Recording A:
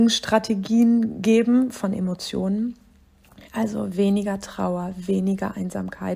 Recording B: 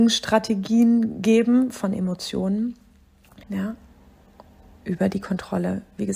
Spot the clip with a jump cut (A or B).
B